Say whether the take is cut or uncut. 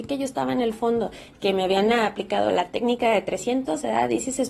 cut